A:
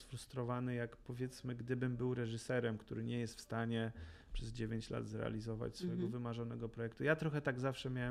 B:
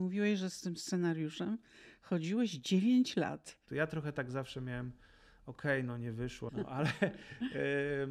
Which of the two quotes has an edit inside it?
B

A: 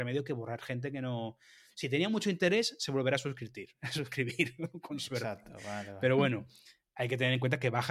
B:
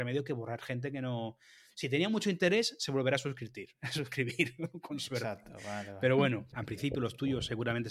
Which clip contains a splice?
B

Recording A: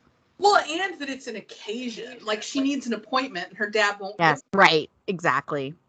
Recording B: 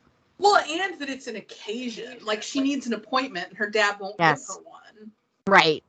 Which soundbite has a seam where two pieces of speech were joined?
A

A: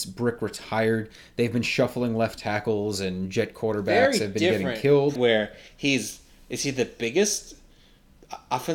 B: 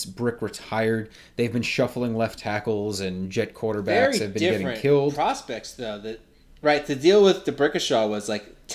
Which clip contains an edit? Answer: A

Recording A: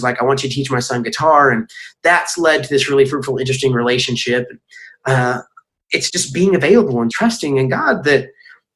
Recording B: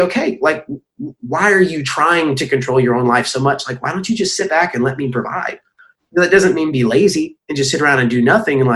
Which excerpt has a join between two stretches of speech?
A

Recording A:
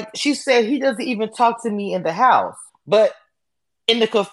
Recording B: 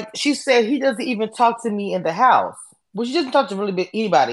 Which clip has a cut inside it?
A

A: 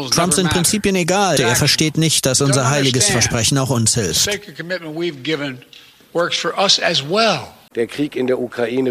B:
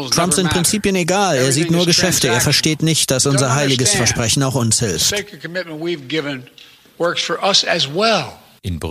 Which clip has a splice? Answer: A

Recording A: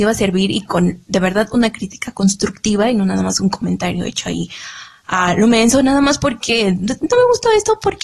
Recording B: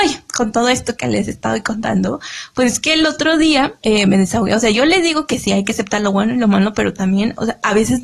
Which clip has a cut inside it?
B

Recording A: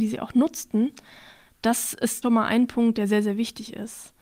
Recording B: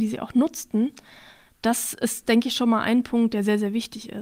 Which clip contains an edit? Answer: A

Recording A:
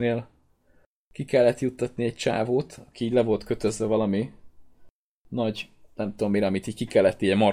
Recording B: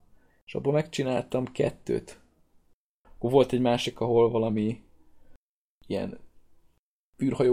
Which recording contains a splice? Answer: B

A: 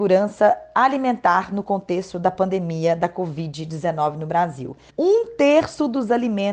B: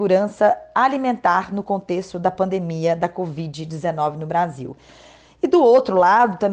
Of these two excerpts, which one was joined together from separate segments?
A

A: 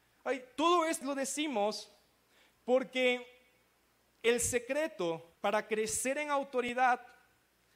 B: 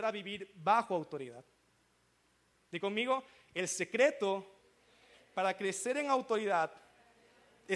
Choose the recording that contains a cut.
A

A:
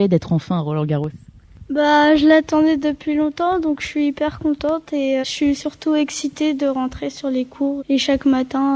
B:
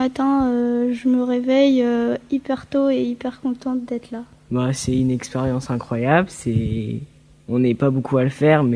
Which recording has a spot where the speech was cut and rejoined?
A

